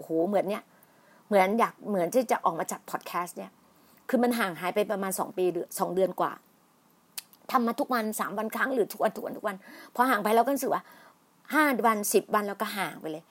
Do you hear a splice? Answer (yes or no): no